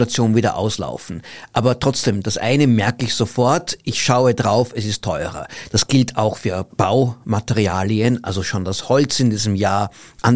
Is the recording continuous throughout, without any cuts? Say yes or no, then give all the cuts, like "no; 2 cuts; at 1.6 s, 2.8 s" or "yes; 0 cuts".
yes; 0 cuts